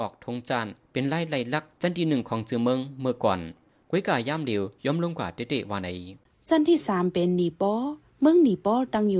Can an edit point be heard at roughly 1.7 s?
yes; 1 cut; at 1.7 s

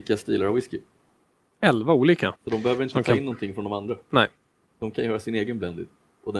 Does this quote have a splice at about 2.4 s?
yes; 1 cut; at 2.4 s

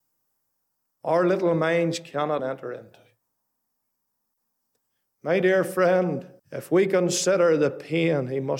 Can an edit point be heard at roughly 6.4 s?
yes; 2 cuts; at 2.4 s, 6.4 s

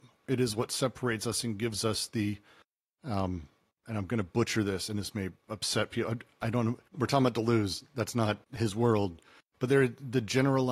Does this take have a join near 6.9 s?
yes; 2 cuts; at 6.9 s, 8.4 s

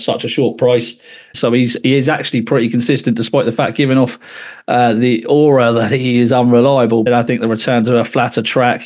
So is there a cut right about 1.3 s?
yes; 2 cuts; at 1.3 s, 7.1 s

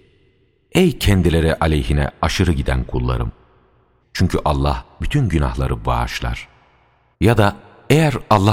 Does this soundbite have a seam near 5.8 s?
no; 2 cuts; at 4.0 s, 7.1 s

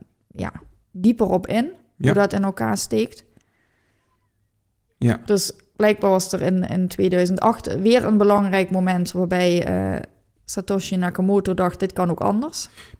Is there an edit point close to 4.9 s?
yes; 1 cut; at 4.9 s

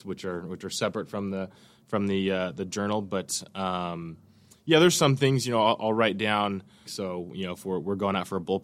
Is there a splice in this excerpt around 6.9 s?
yes; 1 cut; at 6.9 s

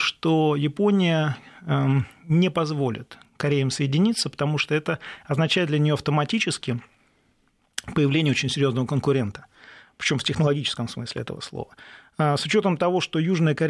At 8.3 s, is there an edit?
no; 0 cuts

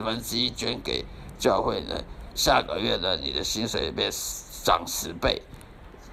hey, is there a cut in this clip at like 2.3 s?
yes; 1 cut; at 2.3 s

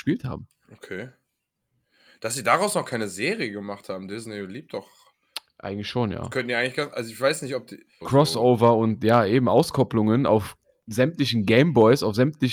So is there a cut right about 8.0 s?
yes; 1 cut; at 8.0 s

